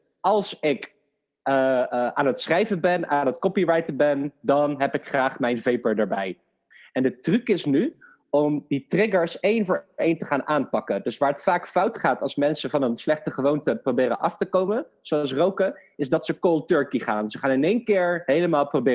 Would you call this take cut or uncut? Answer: uncut